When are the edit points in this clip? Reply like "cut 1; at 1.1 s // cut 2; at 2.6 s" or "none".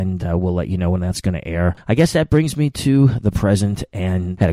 cut 1; at 1.8 s